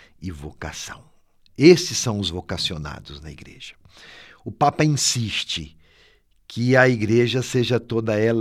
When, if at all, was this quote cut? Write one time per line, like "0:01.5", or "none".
none